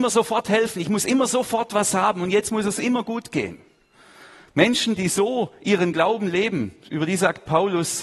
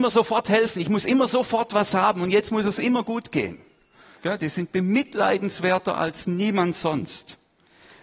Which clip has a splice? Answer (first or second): second